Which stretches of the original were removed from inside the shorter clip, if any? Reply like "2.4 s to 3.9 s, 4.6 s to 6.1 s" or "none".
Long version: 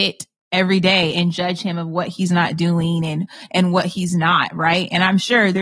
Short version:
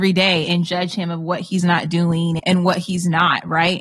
3.1 s to 3.5 s